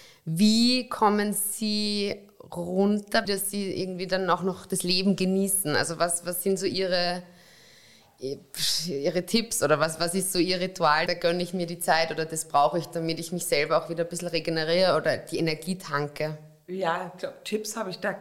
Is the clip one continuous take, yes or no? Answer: no